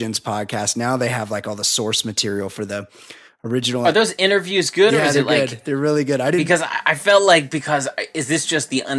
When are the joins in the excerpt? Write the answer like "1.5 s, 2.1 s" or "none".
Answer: none